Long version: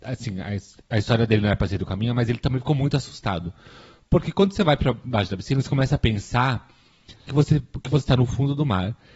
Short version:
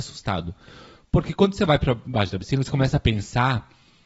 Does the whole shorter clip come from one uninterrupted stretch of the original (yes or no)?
yes